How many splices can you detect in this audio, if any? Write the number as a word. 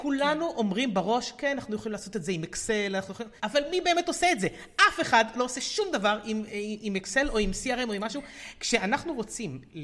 one